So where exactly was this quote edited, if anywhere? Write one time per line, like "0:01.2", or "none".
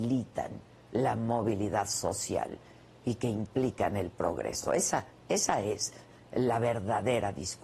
none

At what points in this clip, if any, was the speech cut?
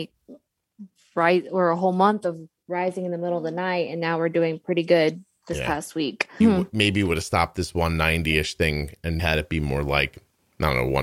0:06.4
0:09.2

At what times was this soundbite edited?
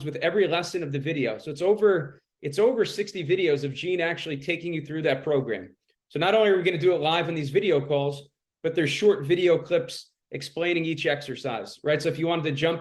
none

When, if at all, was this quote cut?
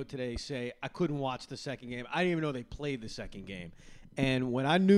none

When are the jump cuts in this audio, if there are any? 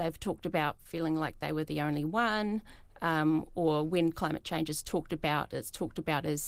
none

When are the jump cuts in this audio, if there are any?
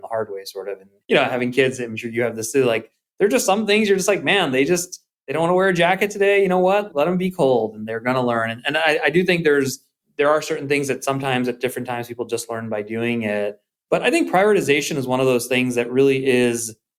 none

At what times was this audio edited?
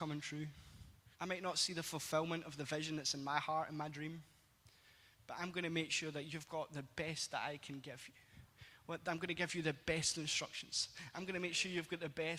0:01.1
0:11.1

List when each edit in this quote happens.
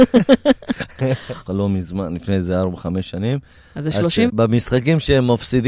0:01.5
0:04.3

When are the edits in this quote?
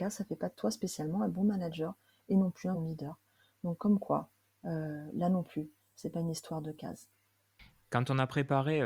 0:02.7

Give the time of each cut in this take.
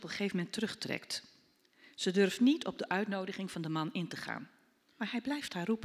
none

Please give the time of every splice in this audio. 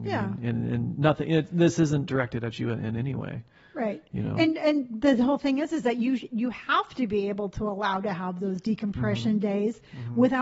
none

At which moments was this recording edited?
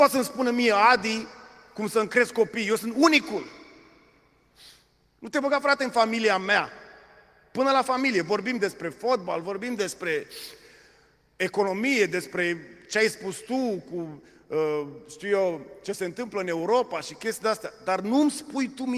none

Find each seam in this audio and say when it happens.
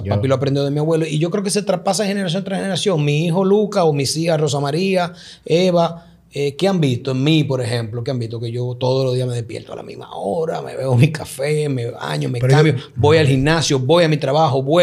none

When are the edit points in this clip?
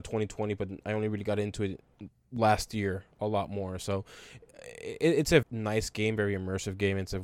0:03.8
0:05.4

